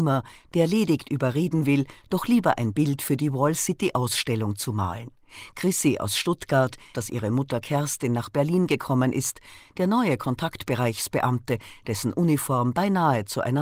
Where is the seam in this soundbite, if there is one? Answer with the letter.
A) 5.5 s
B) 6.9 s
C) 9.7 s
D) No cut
B